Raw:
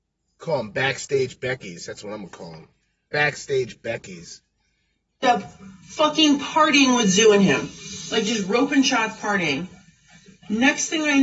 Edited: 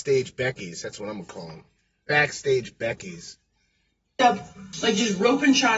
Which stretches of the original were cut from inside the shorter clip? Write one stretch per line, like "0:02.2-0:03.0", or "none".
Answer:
0:05.8-0:08.0

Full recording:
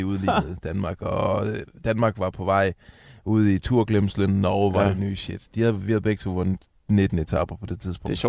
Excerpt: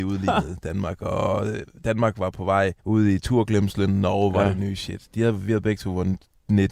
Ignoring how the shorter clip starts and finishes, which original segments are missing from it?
0:02.8-0:03.2

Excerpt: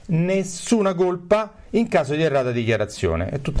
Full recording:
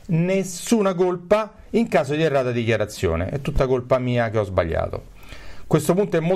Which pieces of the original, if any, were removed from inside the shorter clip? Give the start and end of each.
none

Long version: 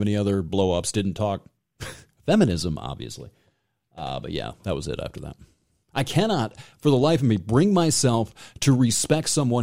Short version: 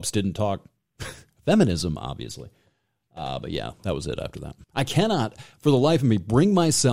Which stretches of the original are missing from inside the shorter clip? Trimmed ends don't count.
0:05.4-0:05.8

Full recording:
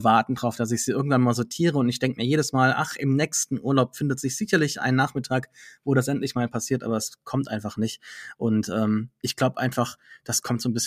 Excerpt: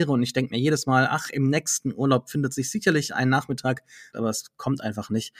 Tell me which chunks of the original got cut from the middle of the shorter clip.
0:05.8-0:06.8

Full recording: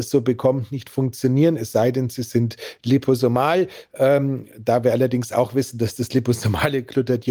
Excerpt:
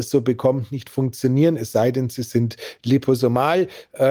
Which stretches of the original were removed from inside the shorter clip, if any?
none

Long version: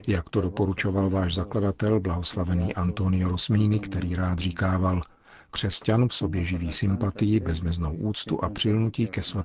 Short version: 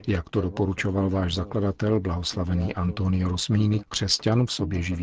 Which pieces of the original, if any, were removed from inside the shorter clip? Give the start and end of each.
0:03.8-0:05.4

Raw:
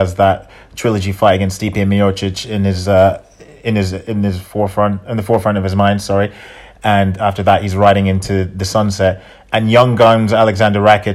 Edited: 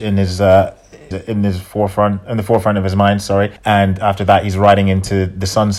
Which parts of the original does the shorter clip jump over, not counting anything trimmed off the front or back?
0:03.6-0:03.9
0:06.4-0:06.7

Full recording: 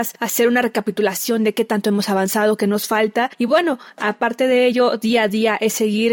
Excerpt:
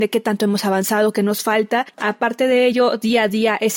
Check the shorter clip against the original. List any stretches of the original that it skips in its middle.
0:03.4-0:03.9

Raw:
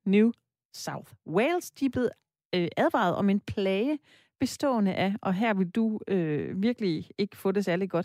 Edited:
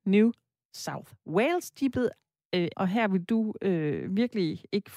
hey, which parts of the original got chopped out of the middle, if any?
0:02.7-0:05.2

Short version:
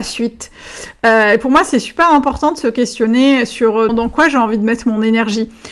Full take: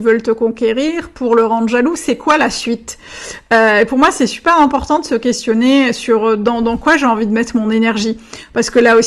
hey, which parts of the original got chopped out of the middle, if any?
0:06.4-0:06.6

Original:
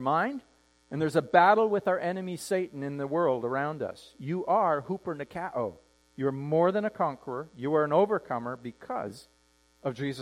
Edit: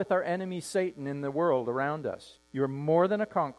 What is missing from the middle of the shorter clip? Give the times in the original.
0:04.1-0:06.0

